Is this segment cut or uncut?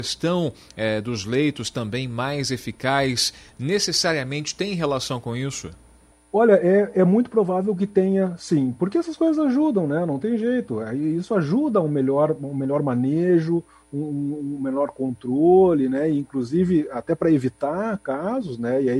uncut